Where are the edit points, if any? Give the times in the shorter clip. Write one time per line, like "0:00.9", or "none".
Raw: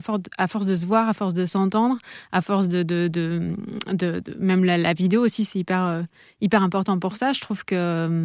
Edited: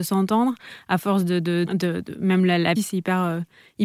0:01.7
0:02.8